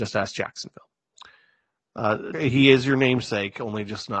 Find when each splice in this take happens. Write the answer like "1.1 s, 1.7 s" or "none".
2.3 s